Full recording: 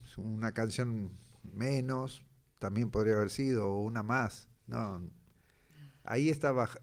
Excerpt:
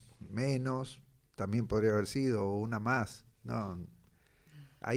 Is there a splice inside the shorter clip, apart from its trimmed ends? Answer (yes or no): no